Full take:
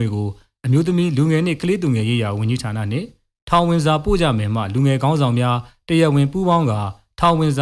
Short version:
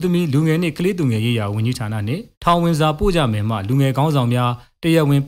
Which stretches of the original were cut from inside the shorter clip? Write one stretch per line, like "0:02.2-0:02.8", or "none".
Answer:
0:03.2-0:03.4